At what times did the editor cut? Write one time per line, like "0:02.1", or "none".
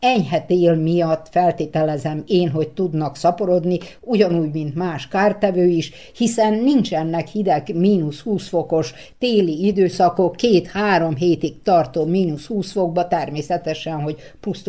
none